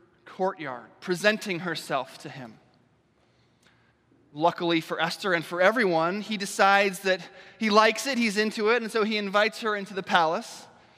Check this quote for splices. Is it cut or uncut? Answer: uncut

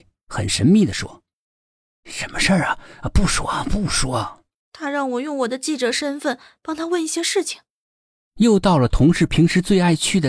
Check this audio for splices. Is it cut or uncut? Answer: cut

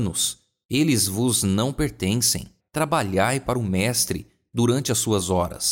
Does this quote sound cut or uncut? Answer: cut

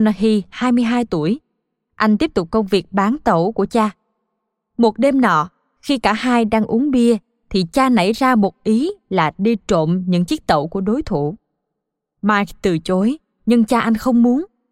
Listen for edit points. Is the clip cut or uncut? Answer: uncut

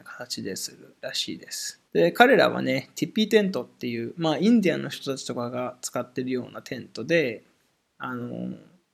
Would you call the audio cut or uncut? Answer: cut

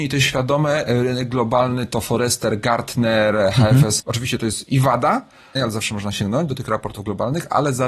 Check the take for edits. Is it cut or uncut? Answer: cut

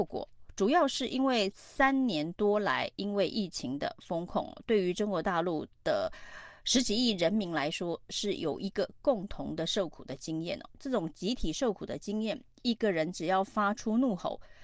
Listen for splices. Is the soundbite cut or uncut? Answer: uncut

